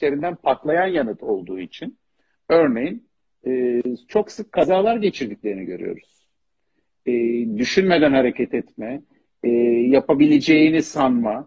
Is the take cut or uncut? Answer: uncut